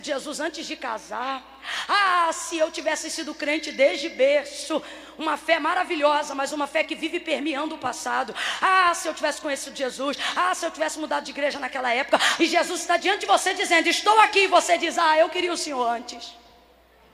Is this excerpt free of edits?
no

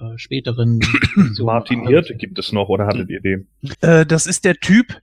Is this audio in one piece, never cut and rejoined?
no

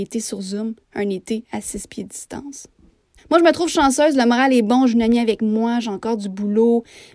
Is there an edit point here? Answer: yes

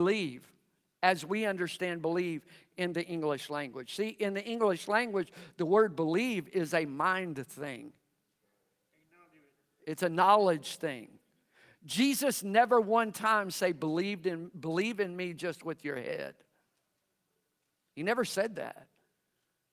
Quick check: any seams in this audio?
no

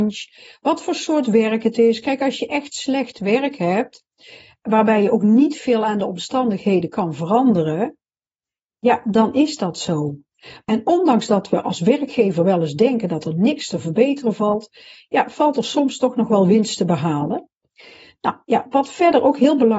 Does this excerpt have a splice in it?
yes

